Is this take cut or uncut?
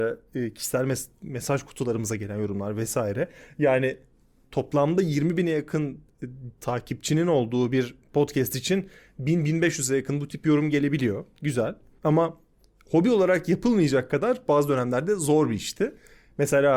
cut